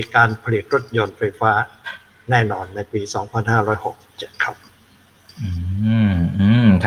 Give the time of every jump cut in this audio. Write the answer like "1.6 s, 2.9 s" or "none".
none